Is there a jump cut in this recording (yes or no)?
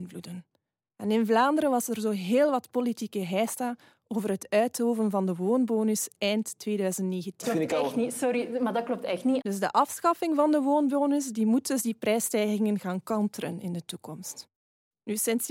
yes